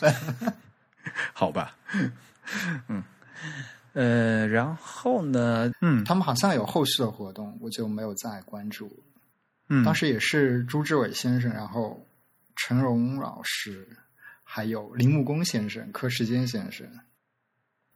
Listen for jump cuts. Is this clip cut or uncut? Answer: cut